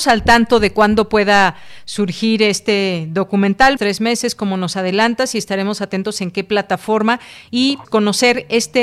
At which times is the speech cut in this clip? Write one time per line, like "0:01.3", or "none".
0:03.8
0:07.8